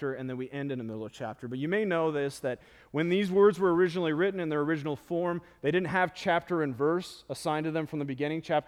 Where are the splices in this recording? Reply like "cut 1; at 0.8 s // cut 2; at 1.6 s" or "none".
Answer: none